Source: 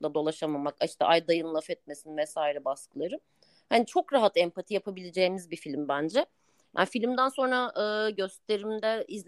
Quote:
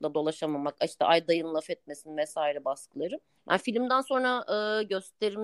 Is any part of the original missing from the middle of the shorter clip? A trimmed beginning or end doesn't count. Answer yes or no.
yes